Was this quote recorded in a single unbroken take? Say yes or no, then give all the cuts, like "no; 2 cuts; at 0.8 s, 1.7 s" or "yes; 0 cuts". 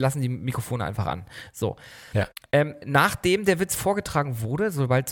yes; 0 cuts